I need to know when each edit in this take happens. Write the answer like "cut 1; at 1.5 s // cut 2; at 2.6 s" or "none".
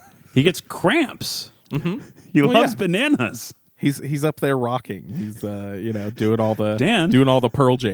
none